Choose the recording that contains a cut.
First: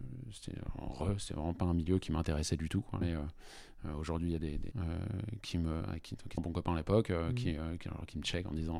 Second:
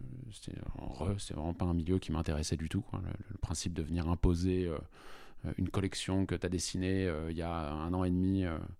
first; 3 cuts; at 3.0 s, 4.7 s, 6.4 s

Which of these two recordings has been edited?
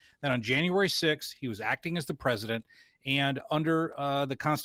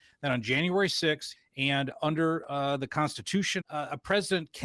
second; 2 cuts; at 1.4 s, 3.6 s

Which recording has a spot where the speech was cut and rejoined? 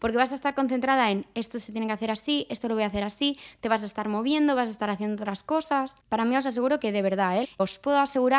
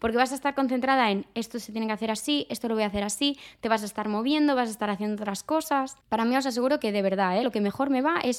first; 1 cut; at 7.4 s

